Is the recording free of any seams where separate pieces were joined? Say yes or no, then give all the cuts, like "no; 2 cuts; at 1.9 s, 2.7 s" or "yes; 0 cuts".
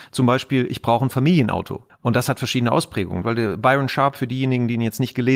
no; 2 cuts; at 1.9 s, 3.2 s